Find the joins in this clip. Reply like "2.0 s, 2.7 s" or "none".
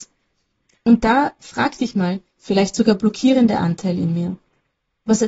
2.4 s